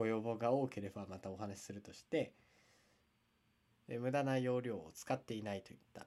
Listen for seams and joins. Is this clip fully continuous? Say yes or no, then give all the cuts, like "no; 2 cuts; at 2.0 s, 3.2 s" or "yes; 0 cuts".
no; 1 cut; at 3.7 s